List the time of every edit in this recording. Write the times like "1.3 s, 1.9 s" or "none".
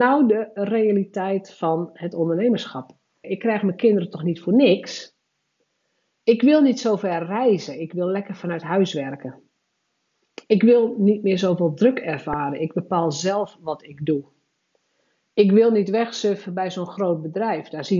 3.2 s